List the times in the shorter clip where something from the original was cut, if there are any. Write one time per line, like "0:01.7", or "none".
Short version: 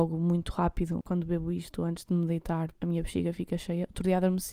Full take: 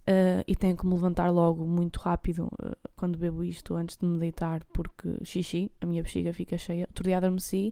0:01.0
0:02.7